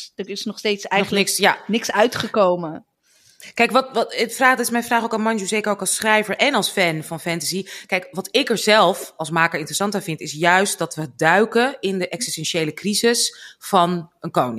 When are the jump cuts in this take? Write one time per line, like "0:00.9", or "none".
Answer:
none